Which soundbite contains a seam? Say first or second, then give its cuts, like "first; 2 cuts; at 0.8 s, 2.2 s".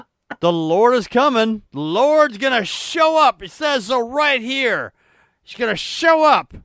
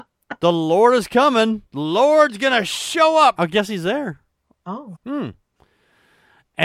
second; 2 cuts; at 3.4 s, 4.9 s